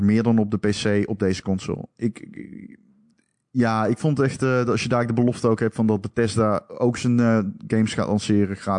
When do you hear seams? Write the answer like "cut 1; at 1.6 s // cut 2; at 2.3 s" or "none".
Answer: none